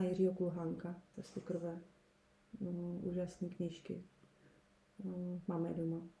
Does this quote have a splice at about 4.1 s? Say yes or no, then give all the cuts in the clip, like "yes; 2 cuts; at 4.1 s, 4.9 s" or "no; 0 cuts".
no; 1 cut; at 1.1 s